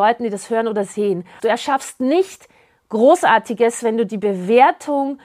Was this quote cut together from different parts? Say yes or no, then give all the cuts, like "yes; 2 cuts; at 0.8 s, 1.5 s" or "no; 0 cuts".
yes; 1 cut; at 1.4 s